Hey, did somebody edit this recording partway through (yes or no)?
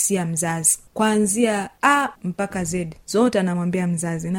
yes